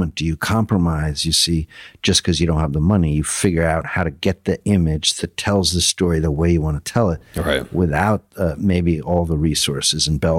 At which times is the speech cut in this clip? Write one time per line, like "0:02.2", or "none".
none